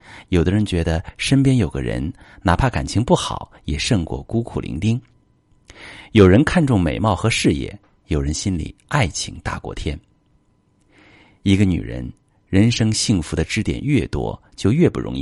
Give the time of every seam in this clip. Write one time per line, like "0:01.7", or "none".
none